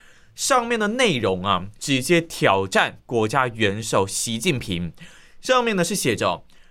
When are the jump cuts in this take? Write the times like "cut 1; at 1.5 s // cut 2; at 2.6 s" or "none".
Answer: cut 1; at 1.8 s

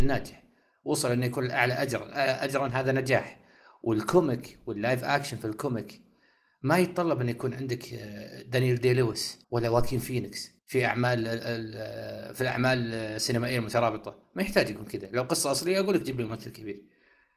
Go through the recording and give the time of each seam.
cut 1; at 9.4 s // cut 2; at 10.6 s

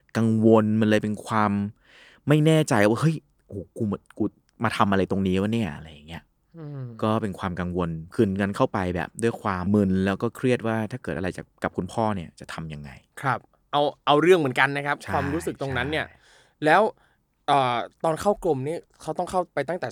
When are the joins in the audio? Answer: cut 1; at 9.7 s

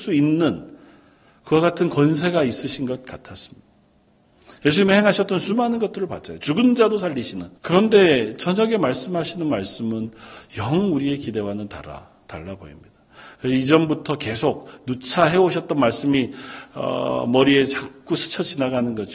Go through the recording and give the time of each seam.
cut 1; at 7.6 s

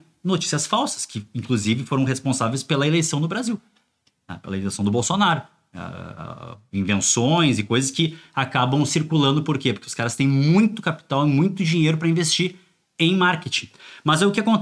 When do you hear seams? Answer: none

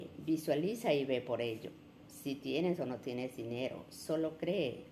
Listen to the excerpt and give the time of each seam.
cut 1; at 2.1 s

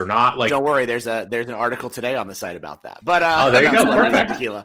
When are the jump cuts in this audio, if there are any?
none

